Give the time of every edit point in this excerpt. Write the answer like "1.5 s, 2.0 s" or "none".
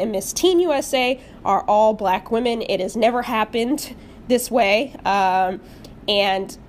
none